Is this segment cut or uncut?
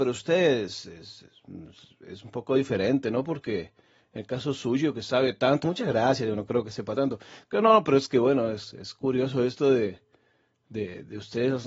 cut